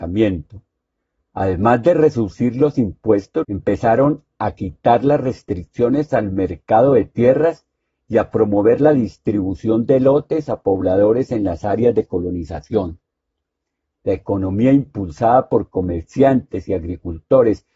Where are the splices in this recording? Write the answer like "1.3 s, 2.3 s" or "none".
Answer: 3.4 s, 13.9 s